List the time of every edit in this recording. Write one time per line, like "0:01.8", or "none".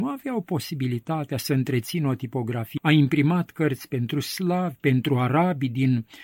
0:02.8
0:04.8